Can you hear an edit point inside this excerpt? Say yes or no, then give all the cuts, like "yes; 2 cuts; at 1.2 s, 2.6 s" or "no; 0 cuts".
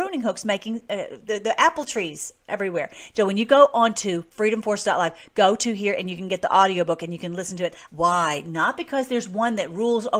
yes; 2 cuts; at 3.1 s, 7.9 s